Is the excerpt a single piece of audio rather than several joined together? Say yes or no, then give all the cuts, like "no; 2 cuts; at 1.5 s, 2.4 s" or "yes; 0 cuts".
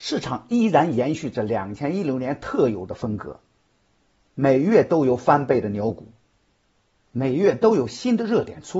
yes; 0 cuts